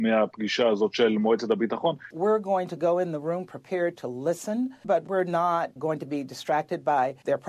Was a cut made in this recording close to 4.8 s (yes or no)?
no